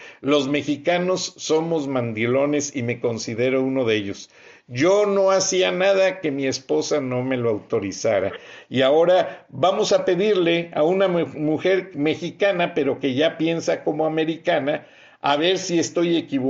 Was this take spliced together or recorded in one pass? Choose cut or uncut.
uncut